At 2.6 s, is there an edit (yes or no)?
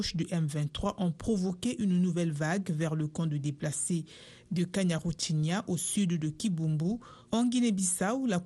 no